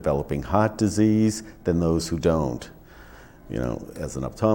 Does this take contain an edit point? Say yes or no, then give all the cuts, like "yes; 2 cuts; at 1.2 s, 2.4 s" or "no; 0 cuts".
no; 0 cuts